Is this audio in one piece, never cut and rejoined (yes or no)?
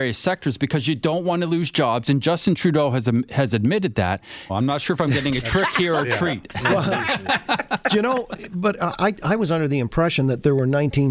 no